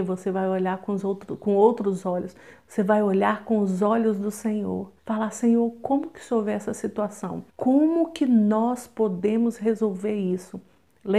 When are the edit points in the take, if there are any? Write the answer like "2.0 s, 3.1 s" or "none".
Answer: 5.0 s, 7.5 s